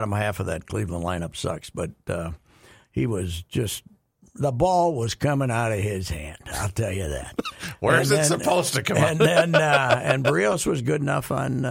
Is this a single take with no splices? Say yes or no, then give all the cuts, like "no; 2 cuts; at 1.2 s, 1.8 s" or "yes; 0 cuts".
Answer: yes; 0 cuts